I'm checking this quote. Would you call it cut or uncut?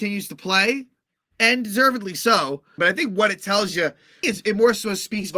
cut